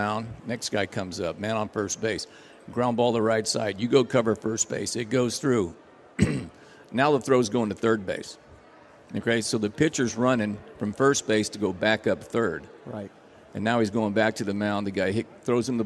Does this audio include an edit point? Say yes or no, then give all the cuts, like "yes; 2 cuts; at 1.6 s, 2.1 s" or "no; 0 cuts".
no; 0 cuts